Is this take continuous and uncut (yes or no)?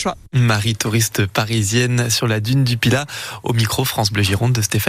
yes